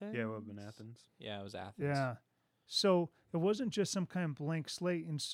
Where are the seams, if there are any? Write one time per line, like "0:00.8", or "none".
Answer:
none

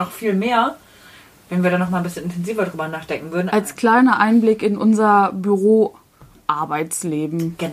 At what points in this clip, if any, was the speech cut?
0:03.5

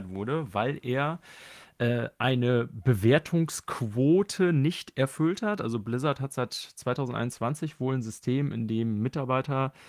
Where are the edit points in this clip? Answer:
none

